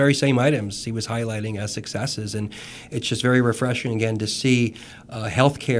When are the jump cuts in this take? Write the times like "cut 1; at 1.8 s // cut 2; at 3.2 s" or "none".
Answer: none

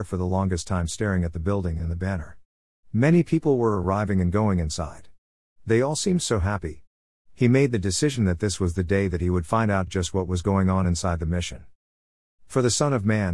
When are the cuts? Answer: none

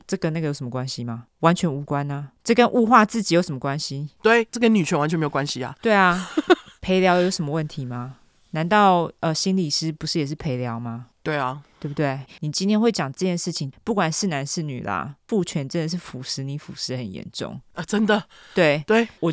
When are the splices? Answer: cut 1; at 12.3 s

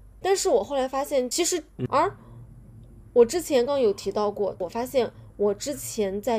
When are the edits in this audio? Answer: cut 1; at 1.8 s // cut 2; at 3.7 s

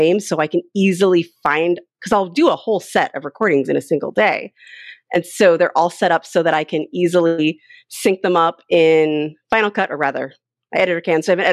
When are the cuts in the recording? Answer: none

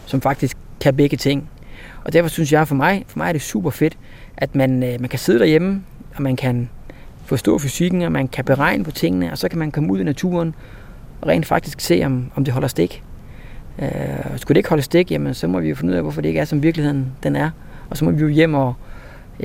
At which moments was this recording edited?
none

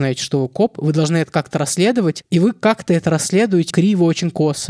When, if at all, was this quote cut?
cut 1; at 3.7 s

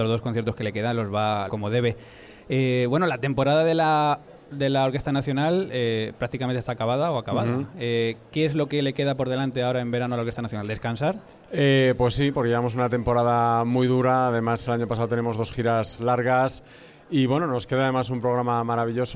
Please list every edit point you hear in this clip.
cut 1; at 1.5 s

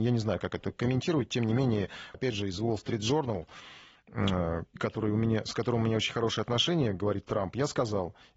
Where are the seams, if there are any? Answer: cut 1; at 2.1 s // cut 2; at 4.8 s

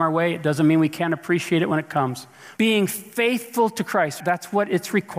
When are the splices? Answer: cut 1; at 2.6 s // cut 2; at 4.2 s

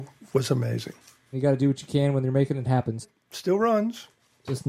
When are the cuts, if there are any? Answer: cut 1; at 1.3 s // cut 2; at 3.0 s

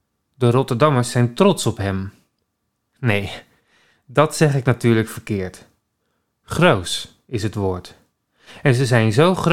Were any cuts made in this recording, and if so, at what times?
none

